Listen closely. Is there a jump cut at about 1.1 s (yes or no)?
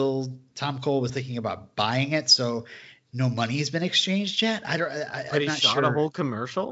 yes